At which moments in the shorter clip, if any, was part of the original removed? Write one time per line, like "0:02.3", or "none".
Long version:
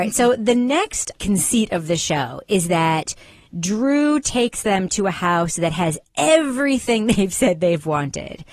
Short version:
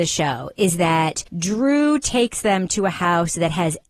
0:01.3